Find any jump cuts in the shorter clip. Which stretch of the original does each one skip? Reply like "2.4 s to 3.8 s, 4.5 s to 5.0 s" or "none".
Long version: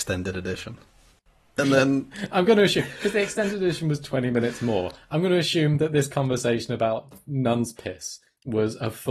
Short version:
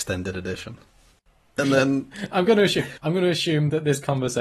3.0 s to 5.1 s